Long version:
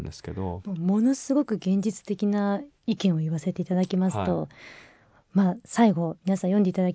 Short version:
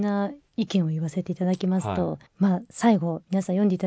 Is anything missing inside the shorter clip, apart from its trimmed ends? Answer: yes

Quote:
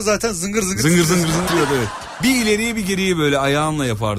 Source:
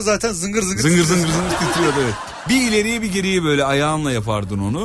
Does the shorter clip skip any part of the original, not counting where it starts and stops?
yes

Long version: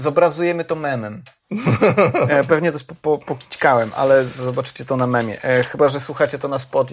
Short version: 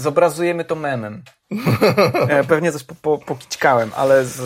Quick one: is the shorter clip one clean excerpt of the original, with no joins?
yes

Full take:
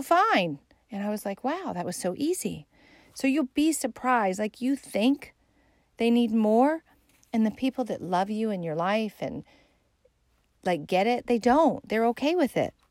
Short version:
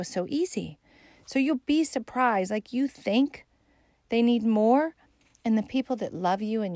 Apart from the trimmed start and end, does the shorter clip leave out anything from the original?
no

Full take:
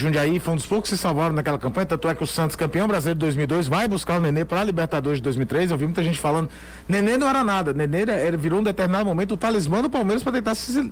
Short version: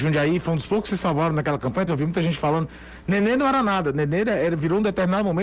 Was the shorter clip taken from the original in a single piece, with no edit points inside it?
no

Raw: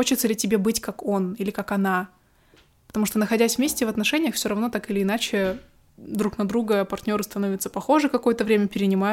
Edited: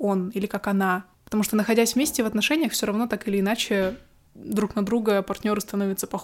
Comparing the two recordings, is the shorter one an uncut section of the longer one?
no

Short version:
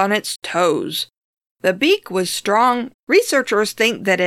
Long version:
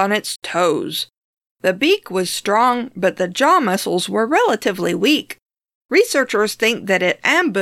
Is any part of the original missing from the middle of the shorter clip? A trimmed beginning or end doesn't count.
yes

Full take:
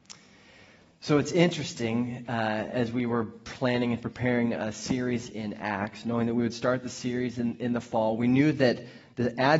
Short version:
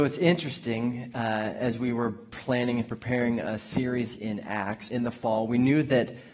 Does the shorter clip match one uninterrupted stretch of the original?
no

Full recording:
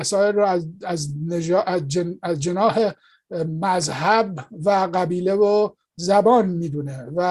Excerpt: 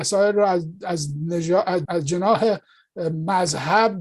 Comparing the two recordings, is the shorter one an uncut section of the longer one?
no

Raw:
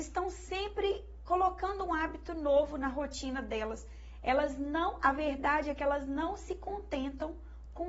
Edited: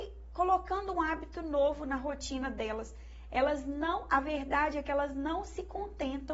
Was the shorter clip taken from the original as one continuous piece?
yes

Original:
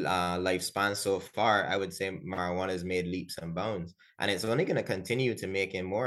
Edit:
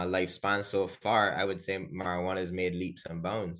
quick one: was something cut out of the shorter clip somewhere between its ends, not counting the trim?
no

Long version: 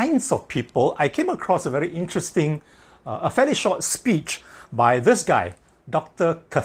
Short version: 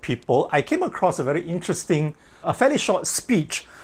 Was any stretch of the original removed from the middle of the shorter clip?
yes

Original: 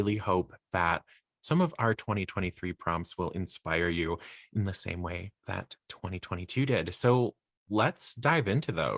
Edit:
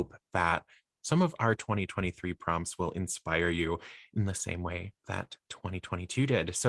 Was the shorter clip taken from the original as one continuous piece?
yes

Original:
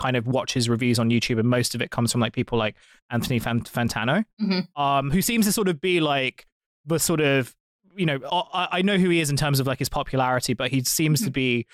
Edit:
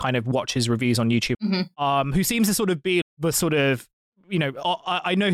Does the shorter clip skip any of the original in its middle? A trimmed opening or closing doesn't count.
yes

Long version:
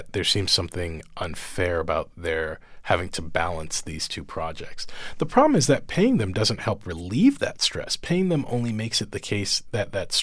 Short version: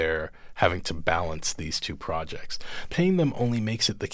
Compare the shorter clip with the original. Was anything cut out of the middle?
yes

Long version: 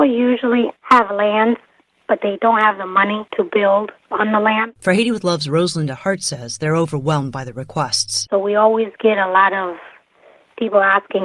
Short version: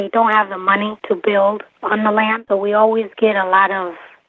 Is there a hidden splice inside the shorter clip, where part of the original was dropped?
yes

